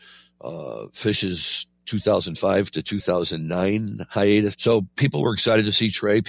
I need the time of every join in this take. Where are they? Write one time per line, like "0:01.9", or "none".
0:04.5